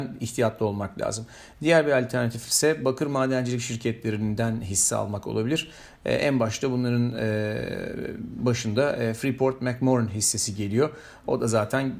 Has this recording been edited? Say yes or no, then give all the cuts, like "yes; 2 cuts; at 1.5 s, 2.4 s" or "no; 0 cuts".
no; 0 cuts